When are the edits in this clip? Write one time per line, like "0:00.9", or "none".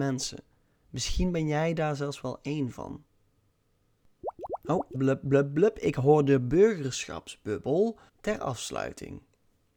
0:04.9
0:08.1